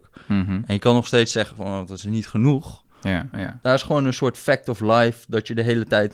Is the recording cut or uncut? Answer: cut